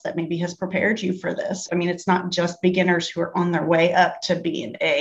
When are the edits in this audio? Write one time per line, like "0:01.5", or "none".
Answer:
0:01.7